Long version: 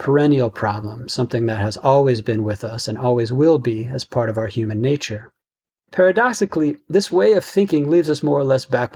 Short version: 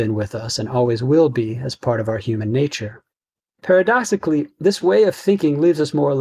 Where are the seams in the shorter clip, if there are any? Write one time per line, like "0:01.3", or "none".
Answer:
none